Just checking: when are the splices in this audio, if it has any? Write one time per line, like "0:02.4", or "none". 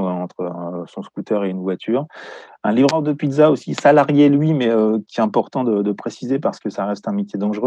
none